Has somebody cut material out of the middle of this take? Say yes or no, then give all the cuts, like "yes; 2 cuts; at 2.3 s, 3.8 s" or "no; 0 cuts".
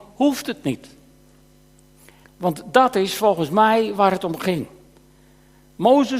yes; 1 cut; at 2.2 s